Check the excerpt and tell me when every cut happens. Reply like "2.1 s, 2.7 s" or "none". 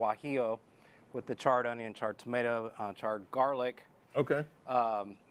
4.0 s